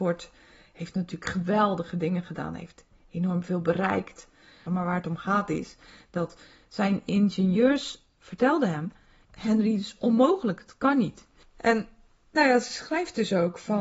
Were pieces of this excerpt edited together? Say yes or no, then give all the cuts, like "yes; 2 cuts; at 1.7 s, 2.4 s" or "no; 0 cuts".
yes; 3 cuts; at 4.7 s, 9.3 s, 11.4 s